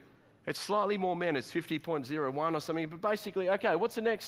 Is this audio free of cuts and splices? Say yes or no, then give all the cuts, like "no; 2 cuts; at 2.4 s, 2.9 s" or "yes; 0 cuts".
yes; 0 cuts